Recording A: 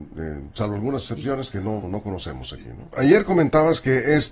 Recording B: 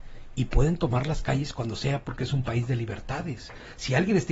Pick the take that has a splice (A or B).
A